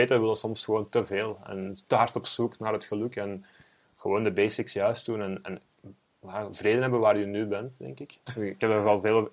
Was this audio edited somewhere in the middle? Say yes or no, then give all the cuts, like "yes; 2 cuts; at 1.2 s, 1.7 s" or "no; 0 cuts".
yes; 1 cut; at 8.3 s